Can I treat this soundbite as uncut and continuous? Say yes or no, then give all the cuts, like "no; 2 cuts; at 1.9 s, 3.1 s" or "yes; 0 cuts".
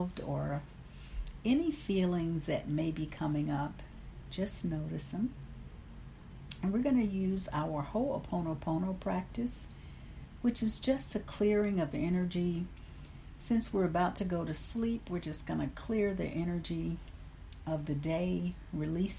yes; 0 cuts